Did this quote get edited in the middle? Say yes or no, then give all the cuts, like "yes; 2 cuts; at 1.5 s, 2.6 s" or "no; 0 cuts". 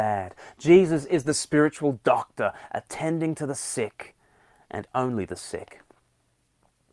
no; 0 cuts